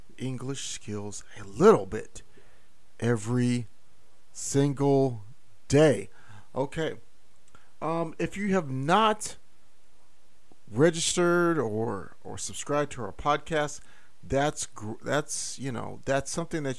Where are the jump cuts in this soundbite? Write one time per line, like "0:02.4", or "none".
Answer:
none